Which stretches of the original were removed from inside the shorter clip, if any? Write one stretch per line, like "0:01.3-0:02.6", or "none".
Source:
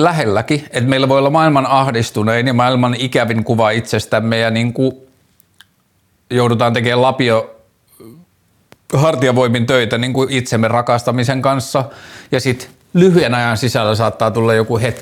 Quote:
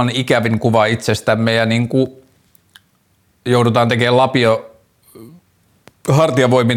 none